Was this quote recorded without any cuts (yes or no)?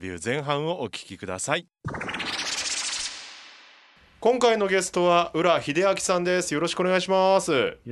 yes